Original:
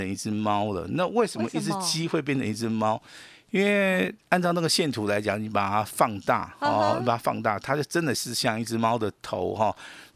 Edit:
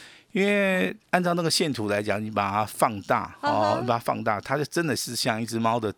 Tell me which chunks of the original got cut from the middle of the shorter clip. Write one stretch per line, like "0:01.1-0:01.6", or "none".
none